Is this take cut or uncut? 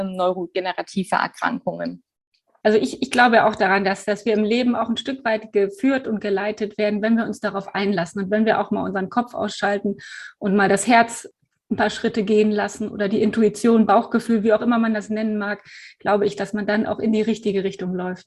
uncut